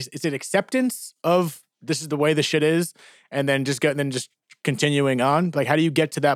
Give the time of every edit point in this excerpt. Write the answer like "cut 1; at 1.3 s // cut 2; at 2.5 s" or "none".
none